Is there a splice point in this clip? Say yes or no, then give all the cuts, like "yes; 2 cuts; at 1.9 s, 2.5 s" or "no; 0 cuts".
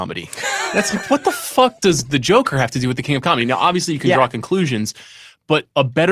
no; 0 cuts